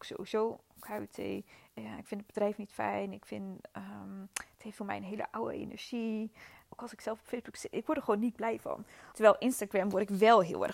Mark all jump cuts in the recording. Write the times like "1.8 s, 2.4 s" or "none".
6.7 s, 9.1 s